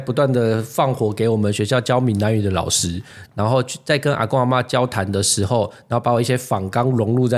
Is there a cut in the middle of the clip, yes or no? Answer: yes